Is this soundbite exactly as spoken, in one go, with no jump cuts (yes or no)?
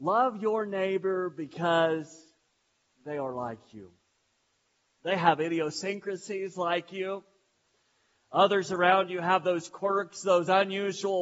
yes